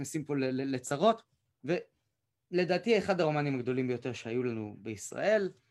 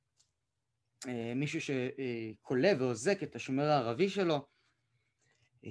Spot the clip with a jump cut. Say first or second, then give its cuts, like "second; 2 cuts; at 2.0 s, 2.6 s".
first; 1 cut; at 1.5 s